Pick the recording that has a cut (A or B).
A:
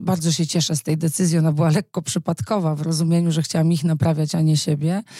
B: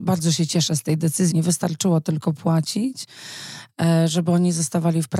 B